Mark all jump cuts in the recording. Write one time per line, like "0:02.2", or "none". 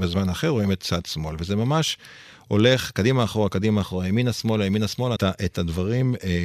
0:05.2